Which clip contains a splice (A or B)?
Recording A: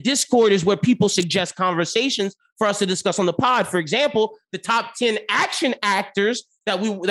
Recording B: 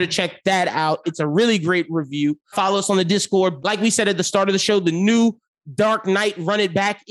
B